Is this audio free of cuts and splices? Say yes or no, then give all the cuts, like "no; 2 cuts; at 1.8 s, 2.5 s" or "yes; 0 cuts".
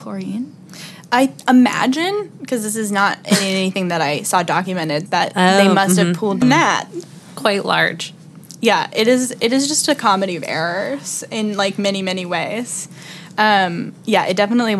no; 2 cuts; at 5.1 s, 6.4 s